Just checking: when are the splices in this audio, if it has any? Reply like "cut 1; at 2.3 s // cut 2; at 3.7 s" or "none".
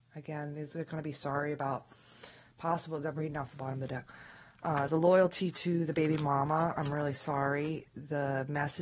none

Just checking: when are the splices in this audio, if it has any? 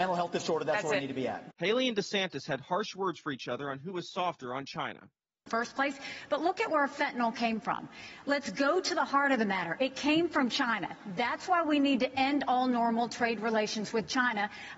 cut 1; at 1.5 s

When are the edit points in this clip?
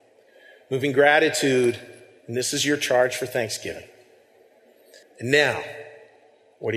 cut 1; at 5.0 s

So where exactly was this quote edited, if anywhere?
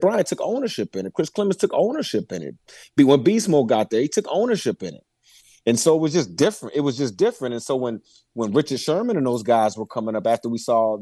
none

